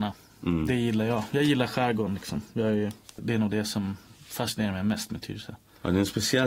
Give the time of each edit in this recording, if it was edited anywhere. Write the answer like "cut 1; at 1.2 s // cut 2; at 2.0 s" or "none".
cut 1; at 3.2 s